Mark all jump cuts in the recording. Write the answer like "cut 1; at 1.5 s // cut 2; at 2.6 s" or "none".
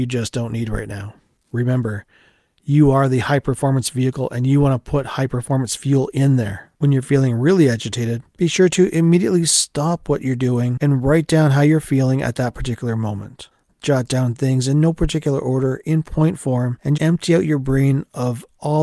cut 1; at 6.7 s // cut 2; at 17.0 s